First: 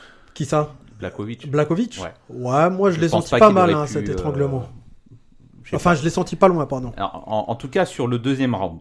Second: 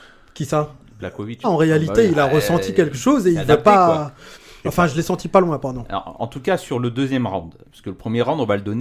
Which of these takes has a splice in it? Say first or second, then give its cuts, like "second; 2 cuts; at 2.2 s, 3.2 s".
second; 3 cuts; at 1.4 s, 4.6 s, 6.2 s